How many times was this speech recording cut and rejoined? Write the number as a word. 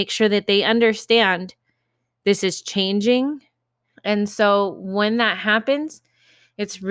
one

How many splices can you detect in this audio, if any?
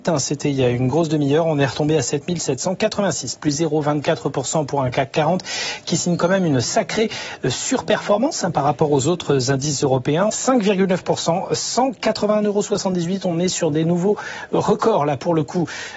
one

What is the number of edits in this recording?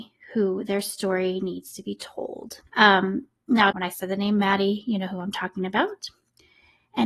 two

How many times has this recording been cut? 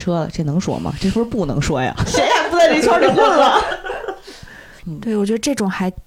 two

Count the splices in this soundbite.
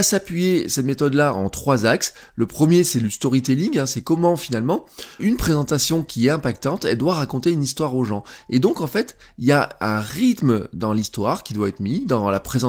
one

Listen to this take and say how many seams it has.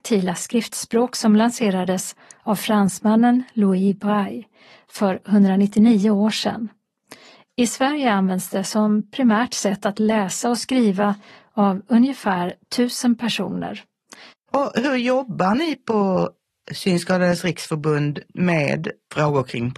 one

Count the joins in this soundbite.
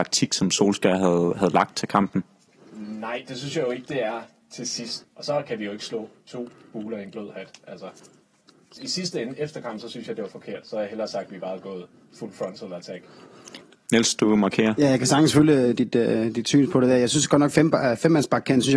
two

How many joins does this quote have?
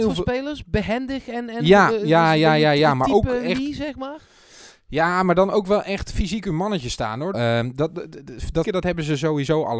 two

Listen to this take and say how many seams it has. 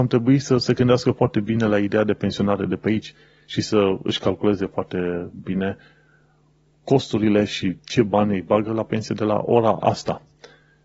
zero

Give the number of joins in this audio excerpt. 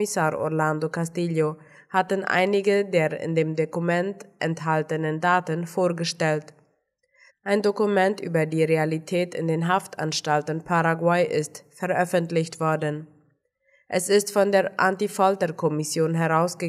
one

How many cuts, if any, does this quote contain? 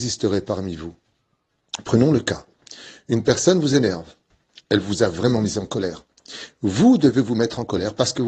zero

